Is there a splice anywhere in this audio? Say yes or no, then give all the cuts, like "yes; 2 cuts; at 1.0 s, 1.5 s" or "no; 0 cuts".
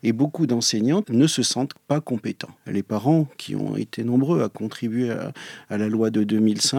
yes; 2 cuts; at 1.0 s, 2.6 s